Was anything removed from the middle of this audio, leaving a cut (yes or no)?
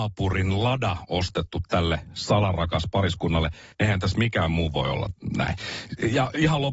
yes